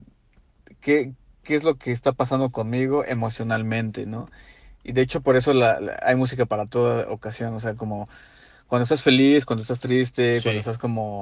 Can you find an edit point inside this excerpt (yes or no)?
no